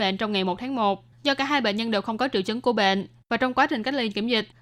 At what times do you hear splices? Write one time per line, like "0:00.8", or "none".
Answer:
0:01.1